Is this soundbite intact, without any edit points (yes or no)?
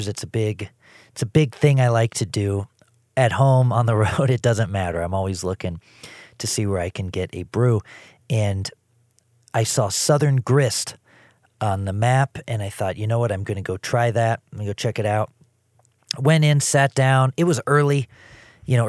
yes